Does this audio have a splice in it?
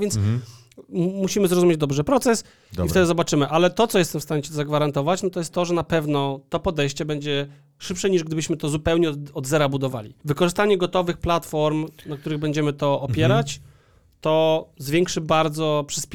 no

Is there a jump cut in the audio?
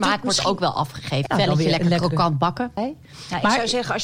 yes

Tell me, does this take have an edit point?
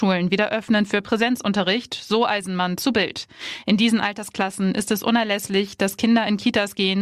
no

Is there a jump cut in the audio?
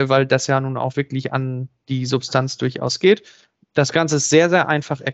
no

